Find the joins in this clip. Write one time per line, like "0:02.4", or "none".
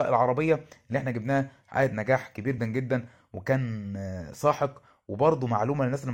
0:02.6